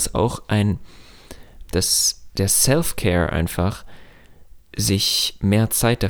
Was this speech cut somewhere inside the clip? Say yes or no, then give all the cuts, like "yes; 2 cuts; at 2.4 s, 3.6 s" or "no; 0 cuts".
yes; 1 cut; at 1.7 s